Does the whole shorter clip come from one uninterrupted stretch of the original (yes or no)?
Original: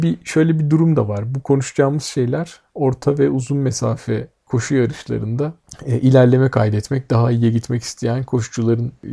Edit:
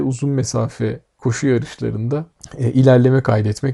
yes